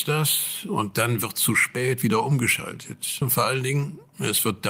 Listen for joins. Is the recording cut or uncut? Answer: cut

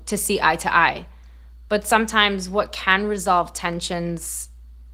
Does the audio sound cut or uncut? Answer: uncut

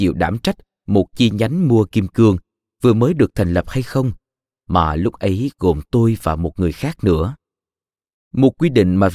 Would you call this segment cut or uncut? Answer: cut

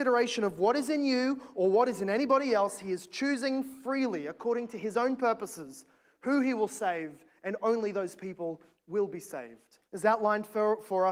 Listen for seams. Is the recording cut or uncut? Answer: cut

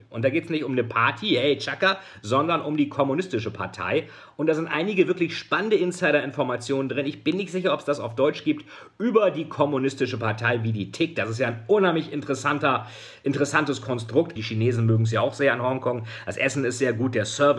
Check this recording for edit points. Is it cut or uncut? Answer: cut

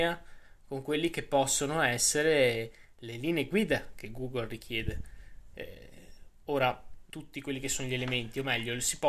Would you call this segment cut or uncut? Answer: cut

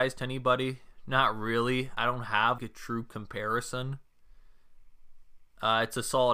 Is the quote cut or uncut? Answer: cut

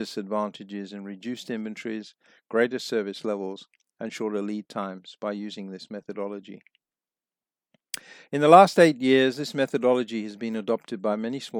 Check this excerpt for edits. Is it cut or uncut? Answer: uncut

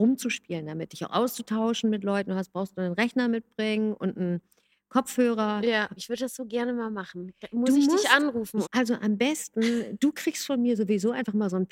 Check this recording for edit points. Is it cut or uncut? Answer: cut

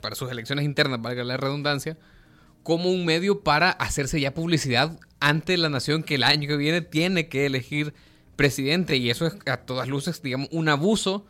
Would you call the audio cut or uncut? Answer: uncut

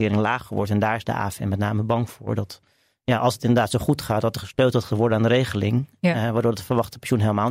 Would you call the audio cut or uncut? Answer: uncut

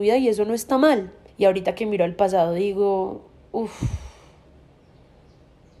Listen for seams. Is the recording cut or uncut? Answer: cut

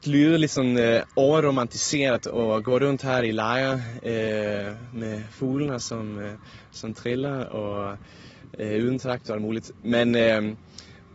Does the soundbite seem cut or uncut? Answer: uncut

